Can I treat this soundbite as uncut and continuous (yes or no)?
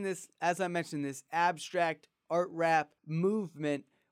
no